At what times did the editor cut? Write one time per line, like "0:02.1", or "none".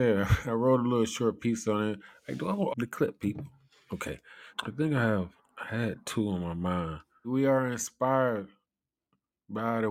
0:02.7
0:04.5
0:07.2